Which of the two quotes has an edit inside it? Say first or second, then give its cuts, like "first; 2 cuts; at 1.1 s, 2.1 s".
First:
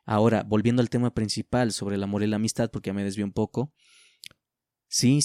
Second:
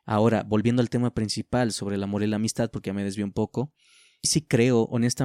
second; 1 cut; at 4.2 s